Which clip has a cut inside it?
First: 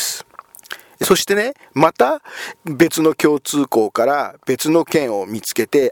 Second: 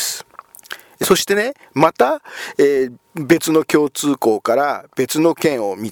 first; 1 cut; at 2.5 s

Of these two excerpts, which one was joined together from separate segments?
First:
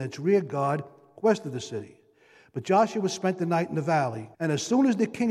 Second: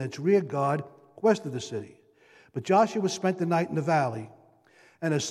first; 1 cut; at 4.3 s

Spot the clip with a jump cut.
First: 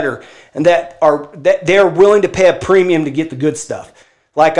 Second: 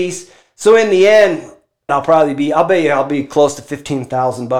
second; 1 cut; at 1.9 s

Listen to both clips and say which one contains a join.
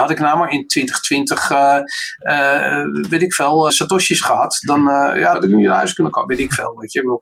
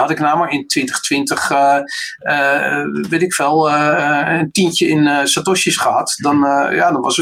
first; 2 cuts; at 3.7 s, 5.3 s

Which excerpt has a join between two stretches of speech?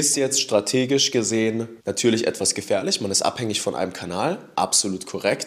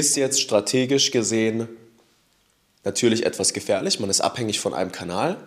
first; 1 cut; at 1.8 s

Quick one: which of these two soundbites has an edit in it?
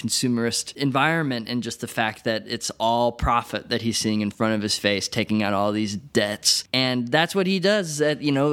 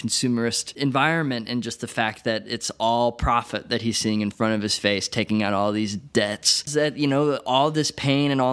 second; 1 cut; at 6.7 s

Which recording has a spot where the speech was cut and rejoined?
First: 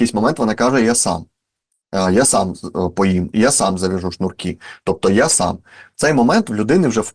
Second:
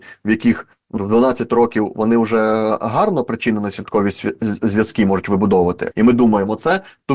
second; 2 cuts; at 1.0 s, 5.9 s

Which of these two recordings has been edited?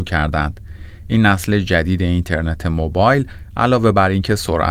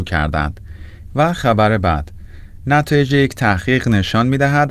second; 1 cut; at 1.1 s

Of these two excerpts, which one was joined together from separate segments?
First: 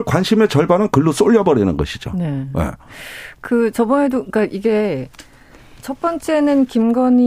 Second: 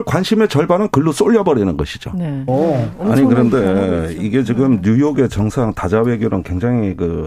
second; 1 cut; at 2.5 s

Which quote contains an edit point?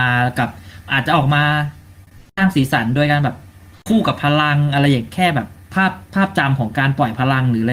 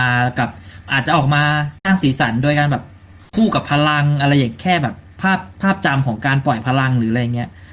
second; 1 cut; at 1.8 s

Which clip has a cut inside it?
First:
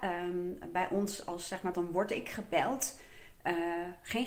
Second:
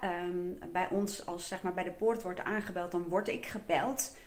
first; 1 cut; at 1.7 s

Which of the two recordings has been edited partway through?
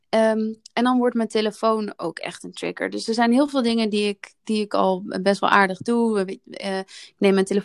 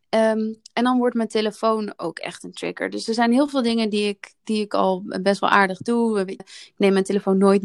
second; 1 cut; at 6.4 s

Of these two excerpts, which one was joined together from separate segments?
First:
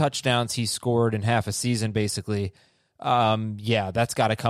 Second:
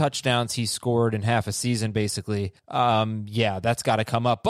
second; 1 cut; at 2.6 s

